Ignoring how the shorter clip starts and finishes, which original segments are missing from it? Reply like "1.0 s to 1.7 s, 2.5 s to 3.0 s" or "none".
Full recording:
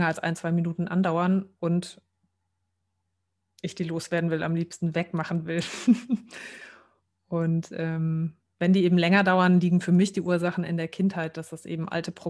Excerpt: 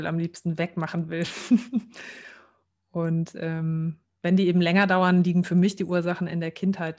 none

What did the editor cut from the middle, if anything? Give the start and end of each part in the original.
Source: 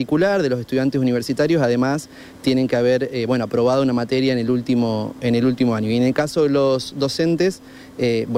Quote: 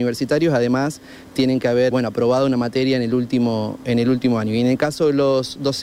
3.0 s to 3.3 s

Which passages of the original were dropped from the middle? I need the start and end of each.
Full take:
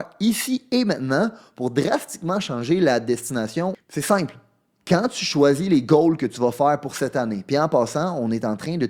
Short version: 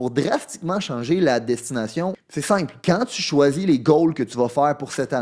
4.4 s to 4.8 s

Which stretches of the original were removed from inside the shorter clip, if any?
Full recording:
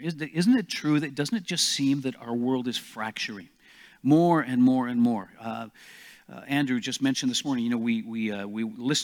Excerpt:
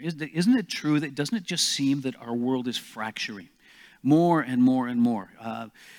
none

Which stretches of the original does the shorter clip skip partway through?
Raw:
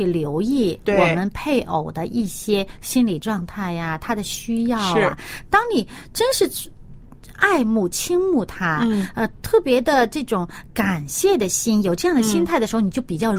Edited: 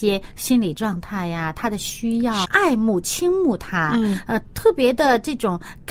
4.9 s to 7.3 s

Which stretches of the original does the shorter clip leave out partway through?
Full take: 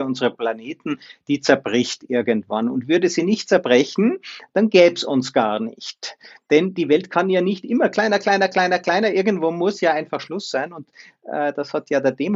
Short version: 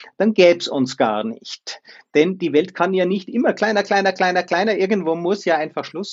none

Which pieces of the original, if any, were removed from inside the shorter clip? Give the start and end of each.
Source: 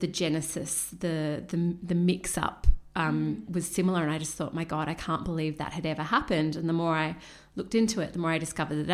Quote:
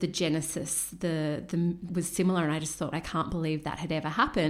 1.9 s to 3.5 s, 4.5 s to 4.9 s

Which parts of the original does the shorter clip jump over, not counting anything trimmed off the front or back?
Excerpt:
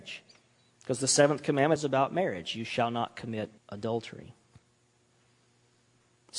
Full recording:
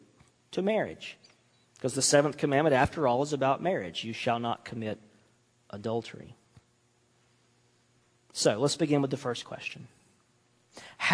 2.7 s to 3.2 s, 5.1 s to 5.6 s

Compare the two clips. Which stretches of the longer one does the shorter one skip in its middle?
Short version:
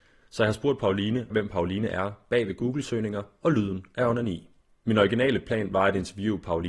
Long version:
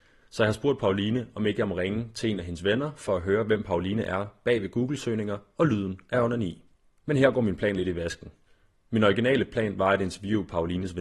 1.3 s to 3.4 s, 7.0 s to 8.9 s

